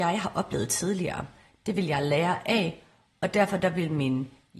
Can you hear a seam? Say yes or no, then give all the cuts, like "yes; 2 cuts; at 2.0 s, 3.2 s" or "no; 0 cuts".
no; 0 cuts